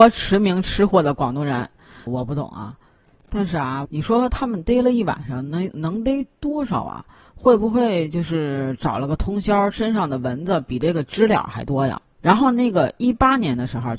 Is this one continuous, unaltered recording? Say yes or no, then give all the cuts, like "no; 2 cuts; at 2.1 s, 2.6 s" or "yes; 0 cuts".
no; 2 cuts; at 2.1 s, 3.8 s